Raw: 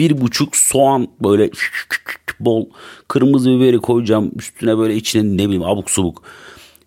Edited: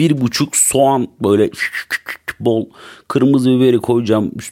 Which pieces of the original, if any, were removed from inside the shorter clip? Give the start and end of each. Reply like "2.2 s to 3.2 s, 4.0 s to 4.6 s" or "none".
none

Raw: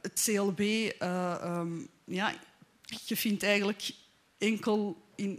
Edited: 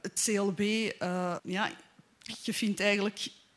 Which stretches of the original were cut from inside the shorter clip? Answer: 1.4 s to 2.0 s

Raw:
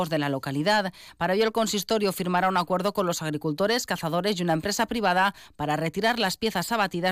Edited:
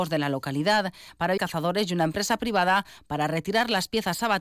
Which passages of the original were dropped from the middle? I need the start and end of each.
1.4 s to 3.9 s

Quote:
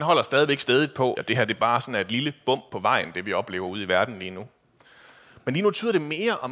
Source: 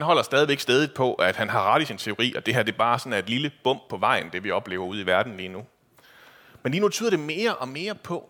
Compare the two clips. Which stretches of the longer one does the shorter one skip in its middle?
1.1 s to 2.3 s

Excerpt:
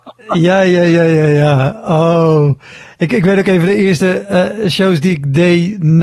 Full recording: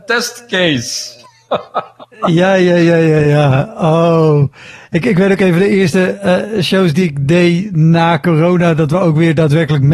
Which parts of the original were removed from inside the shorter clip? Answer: none

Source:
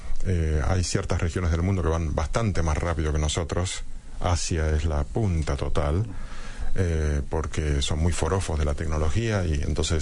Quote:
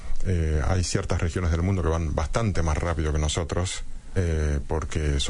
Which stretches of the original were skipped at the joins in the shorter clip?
4.2 s to 6.8 s

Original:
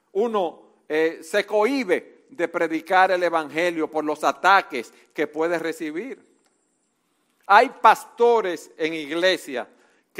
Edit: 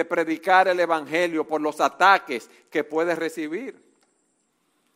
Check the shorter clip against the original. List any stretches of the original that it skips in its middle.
none

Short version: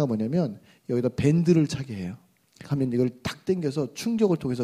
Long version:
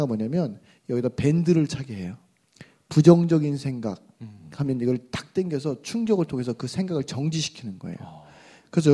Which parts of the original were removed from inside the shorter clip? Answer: 2.6 s to 4.5 s

